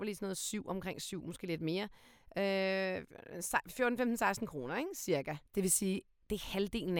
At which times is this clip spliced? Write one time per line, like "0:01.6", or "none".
0:05.5